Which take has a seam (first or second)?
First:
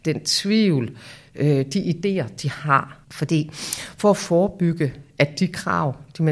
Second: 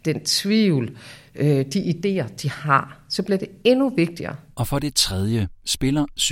first